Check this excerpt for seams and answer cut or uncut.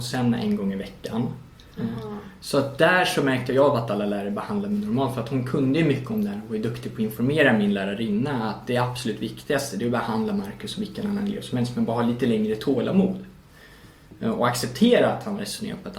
cut